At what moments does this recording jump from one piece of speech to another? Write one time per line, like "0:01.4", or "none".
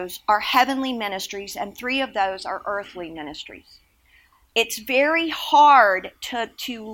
none